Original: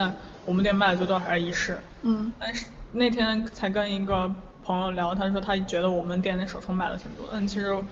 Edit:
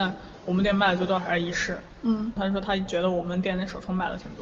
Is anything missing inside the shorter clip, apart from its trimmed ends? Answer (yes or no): yes